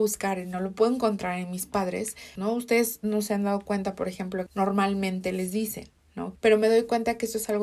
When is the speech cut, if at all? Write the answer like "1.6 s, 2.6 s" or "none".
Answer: 2.4 s, 4.5 s, 6.4 s